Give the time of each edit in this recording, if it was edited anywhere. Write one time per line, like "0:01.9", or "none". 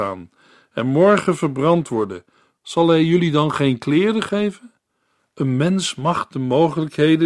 0:02.5
0:05.2